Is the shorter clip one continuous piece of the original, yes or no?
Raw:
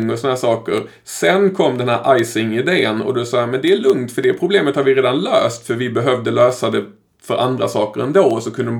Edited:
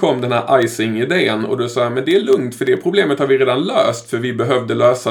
yes